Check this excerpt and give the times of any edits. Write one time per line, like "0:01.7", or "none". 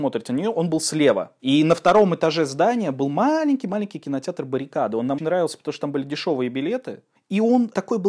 0:01.4
0:05.2